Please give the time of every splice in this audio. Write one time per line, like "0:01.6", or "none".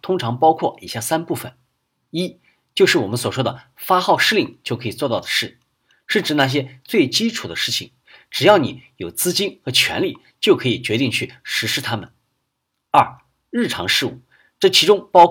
none